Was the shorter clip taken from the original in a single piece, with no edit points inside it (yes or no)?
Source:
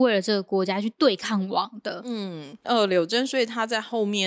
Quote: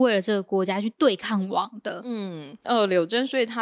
yes